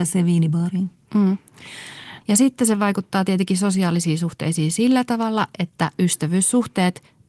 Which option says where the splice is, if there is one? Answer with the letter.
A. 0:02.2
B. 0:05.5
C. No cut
A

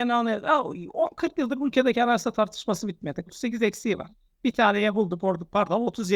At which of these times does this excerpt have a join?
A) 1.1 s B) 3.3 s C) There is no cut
B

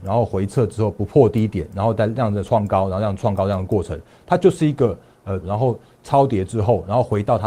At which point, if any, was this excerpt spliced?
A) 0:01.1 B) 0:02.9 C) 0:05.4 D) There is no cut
C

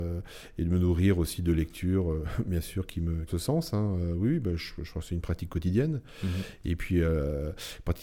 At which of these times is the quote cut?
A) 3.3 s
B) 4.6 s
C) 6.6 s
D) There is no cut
A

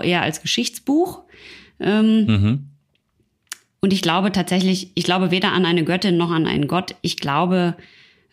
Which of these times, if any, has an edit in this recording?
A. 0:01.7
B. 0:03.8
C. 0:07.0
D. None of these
D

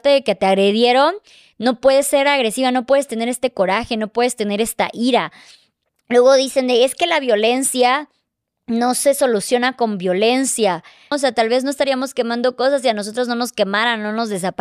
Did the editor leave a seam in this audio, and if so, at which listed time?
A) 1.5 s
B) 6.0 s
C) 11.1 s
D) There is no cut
C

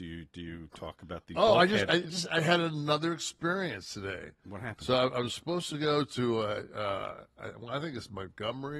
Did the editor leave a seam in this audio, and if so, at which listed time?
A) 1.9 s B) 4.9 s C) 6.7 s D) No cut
A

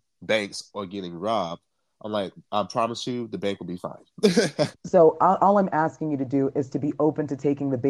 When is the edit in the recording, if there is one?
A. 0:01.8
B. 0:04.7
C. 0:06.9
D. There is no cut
B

